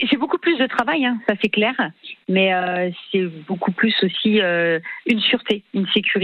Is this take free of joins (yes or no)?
yes